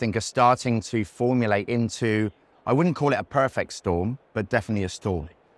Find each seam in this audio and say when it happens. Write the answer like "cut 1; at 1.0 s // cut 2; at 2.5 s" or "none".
cut 1; at 4.3 s